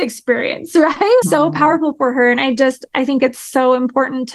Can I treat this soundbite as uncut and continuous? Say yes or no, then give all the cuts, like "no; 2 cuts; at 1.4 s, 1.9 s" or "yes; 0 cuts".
no; 1 cut; at 1.2 s